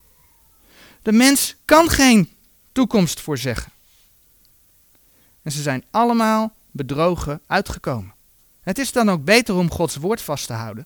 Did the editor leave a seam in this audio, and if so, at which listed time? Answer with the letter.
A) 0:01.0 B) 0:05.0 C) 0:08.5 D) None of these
D